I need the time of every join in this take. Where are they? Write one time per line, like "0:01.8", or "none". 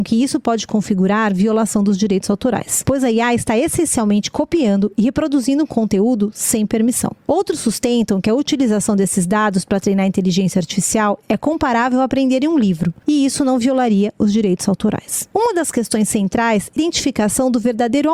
0:16.8